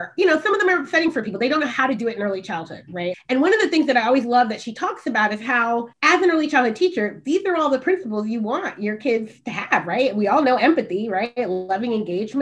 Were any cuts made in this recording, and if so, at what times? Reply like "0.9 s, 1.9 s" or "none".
3.1 s, 5.9 s